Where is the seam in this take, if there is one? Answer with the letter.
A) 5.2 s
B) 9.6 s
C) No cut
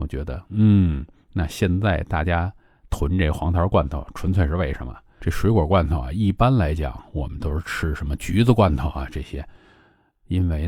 A